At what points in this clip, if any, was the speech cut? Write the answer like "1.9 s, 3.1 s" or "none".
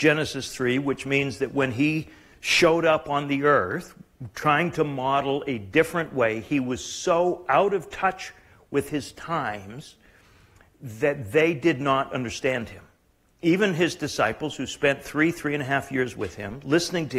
none